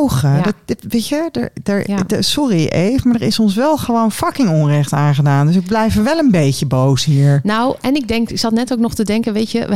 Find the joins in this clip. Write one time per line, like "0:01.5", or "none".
none